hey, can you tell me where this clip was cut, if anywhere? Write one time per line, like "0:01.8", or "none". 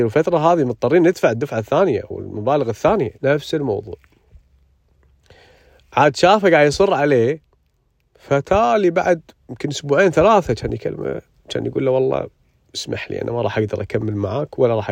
0:03.2

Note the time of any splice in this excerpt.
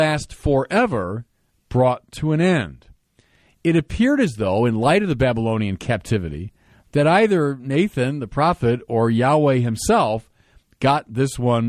0:03.5

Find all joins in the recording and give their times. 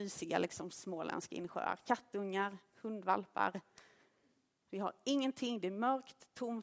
none

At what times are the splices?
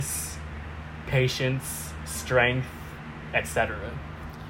none

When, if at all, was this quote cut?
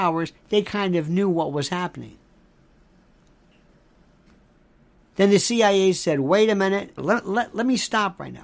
0:07.0

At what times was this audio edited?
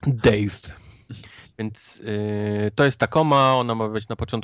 none

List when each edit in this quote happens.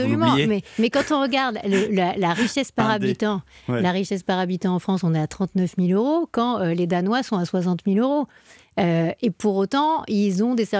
none

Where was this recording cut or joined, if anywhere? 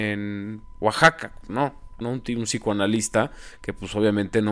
0:02.0

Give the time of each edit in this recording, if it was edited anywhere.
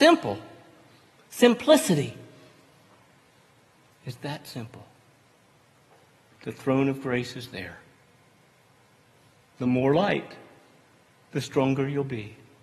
0:09.4

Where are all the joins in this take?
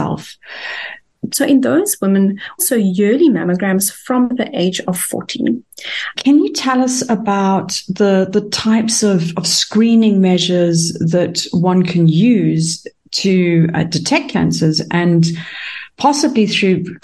0:01.3
0:02.6
0:06.1

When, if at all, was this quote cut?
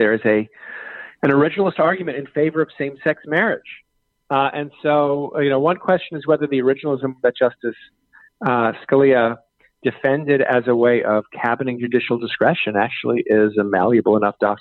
none

